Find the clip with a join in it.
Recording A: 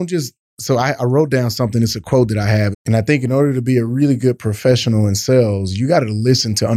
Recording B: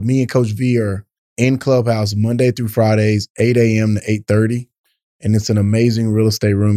A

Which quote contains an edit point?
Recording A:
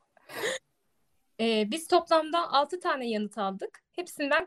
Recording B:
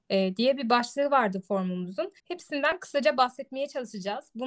B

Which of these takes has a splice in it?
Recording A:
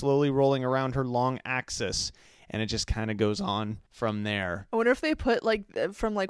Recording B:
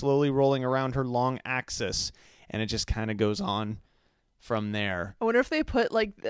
A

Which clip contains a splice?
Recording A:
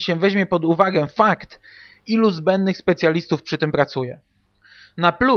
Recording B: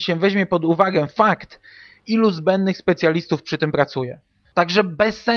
B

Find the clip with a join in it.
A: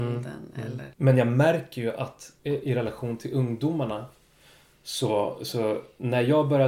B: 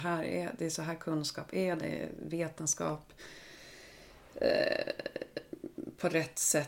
A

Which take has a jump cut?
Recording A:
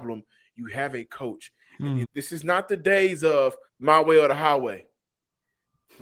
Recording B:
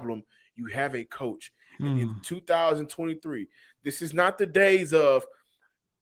A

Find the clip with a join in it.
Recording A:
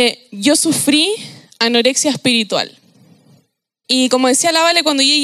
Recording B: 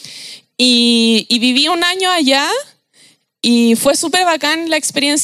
A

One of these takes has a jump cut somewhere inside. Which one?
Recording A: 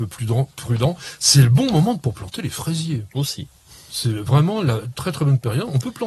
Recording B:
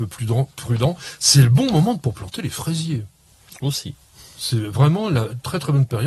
A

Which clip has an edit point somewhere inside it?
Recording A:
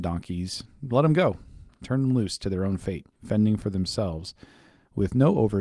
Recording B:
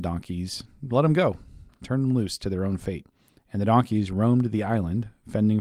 A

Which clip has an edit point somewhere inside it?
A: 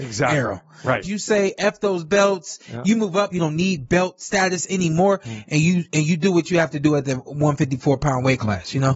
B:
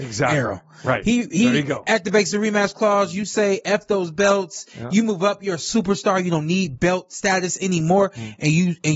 A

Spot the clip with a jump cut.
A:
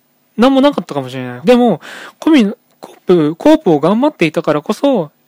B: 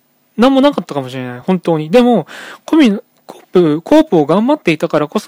A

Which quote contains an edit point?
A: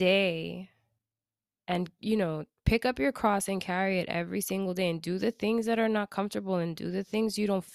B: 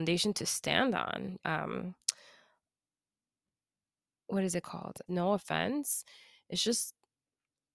B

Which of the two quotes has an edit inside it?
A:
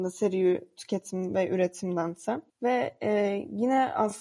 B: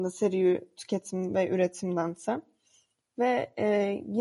A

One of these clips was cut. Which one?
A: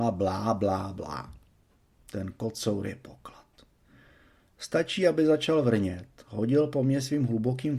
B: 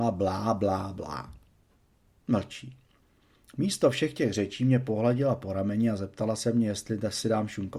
A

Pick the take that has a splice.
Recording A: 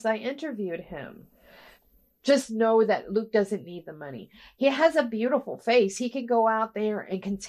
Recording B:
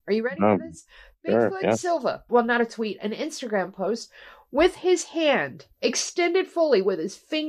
B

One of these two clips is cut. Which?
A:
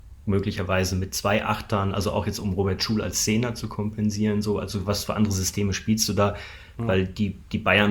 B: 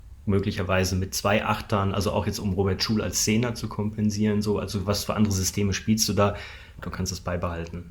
B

